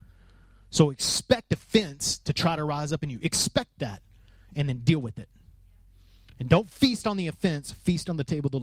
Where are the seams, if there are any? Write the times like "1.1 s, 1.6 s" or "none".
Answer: none